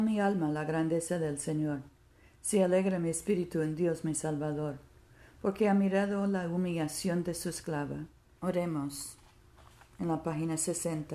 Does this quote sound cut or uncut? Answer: cut